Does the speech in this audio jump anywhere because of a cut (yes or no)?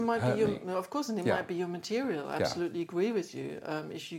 no